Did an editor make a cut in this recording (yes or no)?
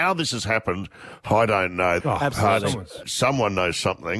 yes